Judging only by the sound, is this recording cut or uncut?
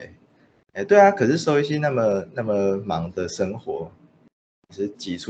uncut